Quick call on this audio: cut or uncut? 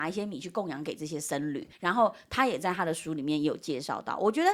cut